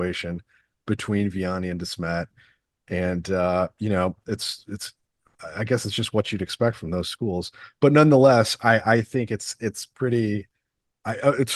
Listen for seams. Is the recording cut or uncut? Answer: uncut